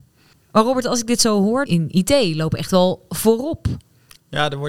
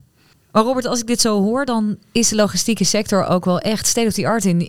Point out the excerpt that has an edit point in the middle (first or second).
first